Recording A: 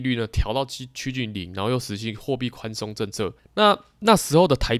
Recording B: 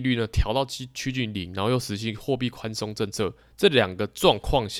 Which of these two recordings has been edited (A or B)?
A